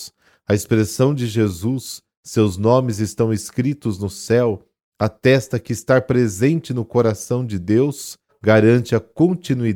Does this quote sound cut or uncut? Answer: cut